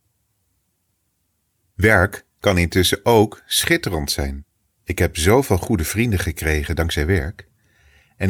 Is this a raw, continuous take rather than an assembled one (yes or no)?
yes